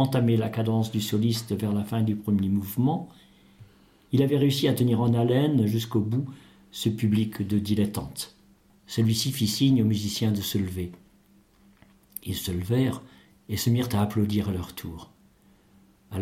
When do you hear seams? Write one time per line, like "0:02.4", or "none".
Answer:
0:08.7